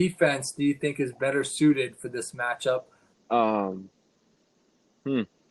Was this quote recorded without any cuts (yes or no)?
no